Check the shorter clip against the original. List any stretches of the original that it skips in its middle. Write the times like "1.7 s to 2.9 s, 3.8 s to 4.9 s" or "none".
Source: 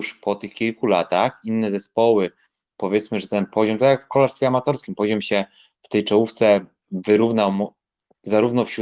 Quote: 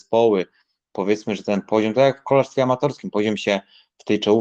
none

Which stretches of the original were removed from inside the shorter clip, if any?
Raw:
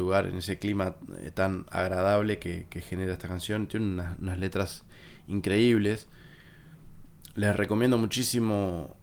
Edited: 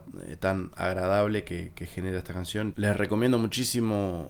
3.7 s to 7.3 s

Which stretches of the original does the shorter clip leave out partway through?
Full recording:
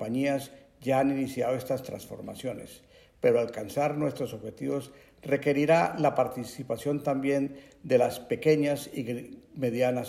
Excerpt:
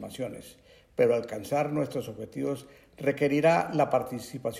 none

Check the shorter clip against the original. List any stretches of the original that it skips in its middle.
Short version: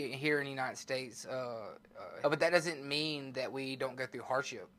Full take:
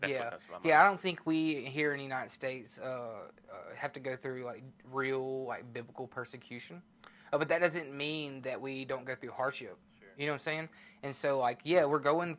3.7 s to 7.3 s

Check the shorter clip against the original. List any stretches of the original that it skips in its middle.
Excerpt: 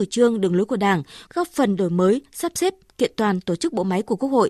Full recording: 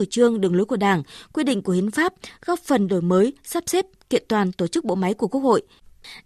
1.3 s to 2.4 s

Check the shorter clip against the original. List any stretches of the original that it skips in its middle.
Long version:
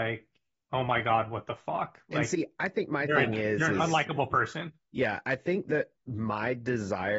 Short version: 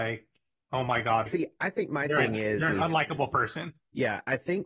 1.3 s to 2.3 s

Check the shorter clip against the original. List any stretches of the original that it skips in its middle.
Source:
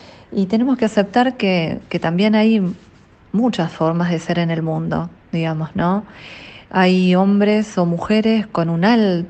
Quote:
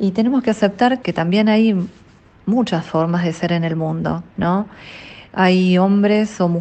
1.4 s to 1.9 s, 5.2 s to 5.7 s

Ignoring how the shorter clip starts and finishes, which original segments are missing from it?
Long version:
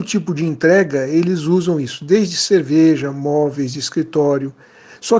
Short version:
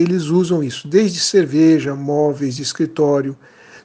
none

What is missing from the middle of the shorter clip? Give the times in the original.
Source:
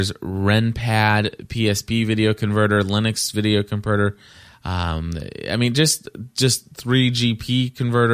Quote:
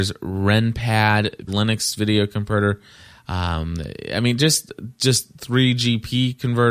1.5 s to 2.8 s

